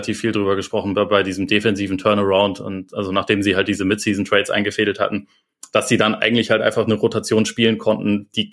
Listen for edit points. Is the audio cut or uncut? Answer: uncut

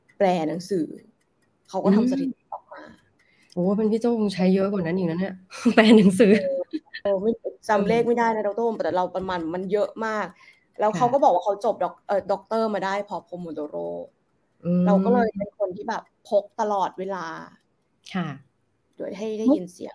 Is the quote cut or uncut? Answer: cut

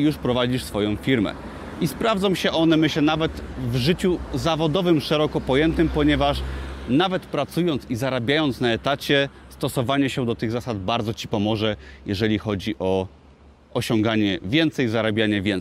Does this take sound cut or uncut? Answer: uncut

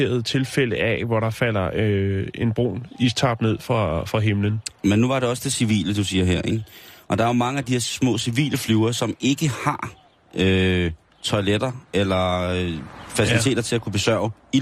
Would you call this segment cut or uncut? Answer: uncut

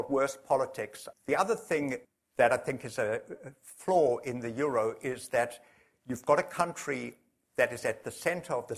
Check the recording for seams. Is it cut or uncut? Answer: cut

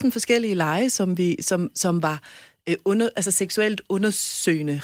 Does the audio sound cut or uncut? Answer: uncut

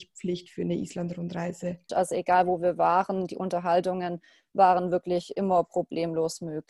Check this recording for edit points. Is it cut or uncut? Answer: cut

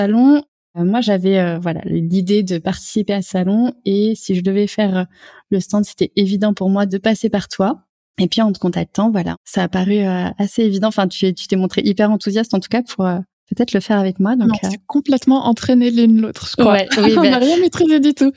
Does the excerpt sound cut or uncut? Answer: uncut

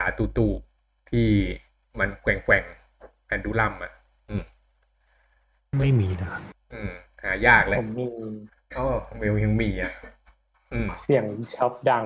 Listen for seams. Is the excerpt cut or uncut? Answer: uncut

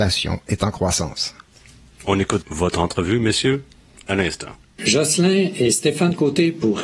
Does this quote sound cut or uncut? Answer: cut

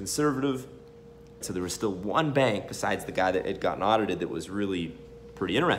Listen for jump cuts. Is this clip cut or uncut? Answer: cut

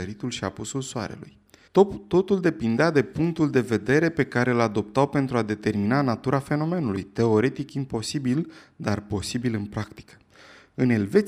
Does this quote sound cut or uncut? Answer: cut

